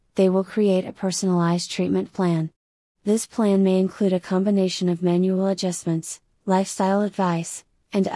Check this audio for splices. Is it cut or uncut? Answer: cut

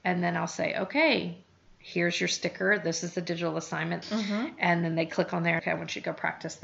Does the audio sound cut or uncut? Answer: cut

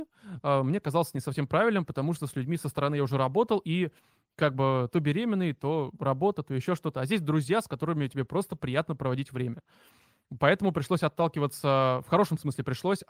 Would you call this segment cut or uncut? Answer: uncut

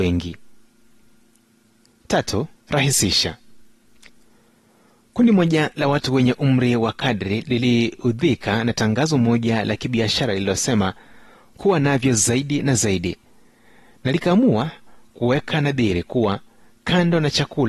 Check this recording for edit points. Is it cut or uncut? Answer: cut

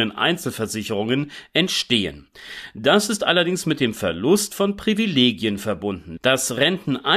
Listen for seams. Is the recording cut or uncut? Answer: cut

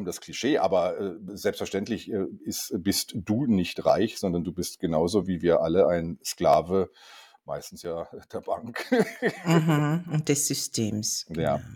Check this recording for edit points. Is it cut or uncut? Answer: uncut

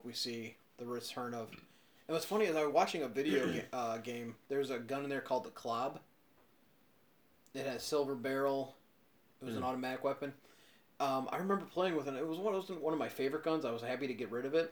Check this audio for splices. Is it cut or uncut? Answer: cut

